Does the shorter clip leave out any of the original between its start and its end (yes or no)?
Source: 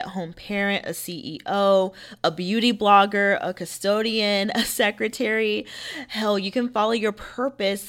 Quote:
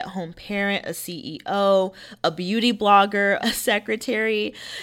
yes